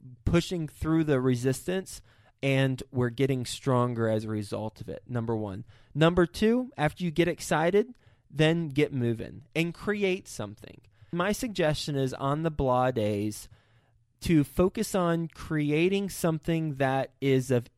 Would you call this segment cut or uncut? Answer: uncut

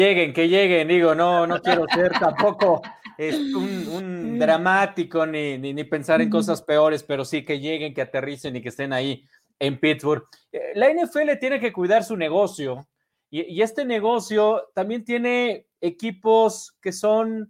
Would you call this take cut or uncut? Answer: uncut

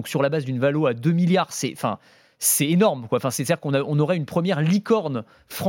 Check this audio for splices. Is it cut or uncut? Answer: uncut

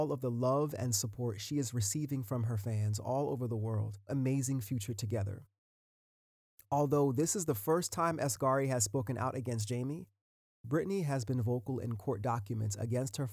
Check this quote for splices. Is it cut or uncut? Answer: cut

